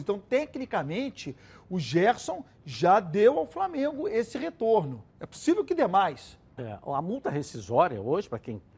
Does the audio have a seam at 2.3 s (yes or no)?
no